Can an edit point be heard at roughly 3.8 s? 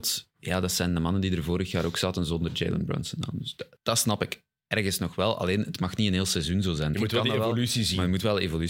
yes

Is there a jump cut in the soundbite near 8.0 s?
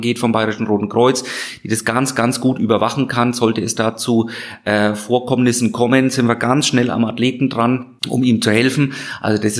yes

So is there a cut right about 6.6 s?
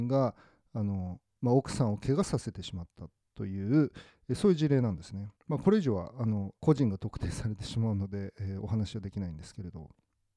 yes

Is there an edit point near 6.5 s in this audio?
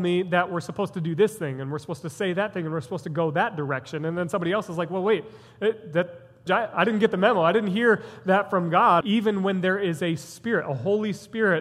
yes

